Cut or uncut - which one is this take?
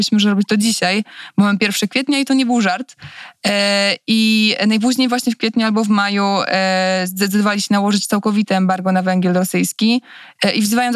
uncut